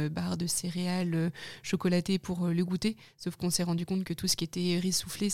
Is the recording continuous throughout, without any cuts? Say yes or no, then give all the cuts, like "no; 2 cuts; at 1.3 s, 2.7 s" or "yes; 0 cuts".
yes; 0 cuts